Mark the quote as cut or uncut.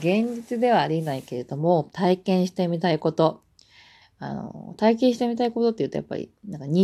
cut